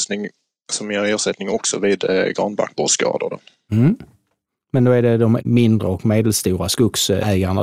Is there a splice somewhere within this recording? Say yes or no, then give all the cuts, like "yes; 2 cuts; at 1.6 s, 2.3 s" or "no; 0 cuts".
no; 0 cuts